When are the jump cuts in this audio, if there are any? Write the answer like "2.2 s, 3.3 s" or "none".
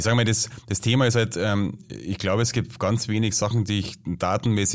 none